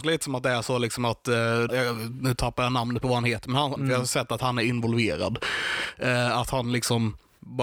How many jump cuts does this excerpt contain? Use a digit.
2